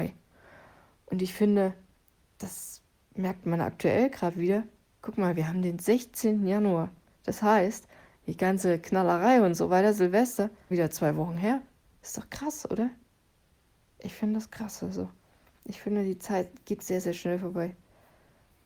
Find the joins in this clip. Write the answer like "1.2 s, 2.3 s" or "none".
10.7 s, 16.8 s